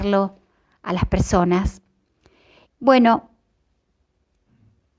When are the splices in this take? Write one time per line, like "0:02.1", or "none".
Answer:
0:02.6